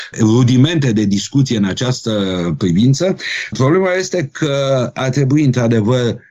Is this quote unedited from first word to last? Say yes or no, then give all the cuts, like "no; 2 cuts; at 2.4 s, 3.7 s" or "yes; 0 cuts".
yes; 0 cuts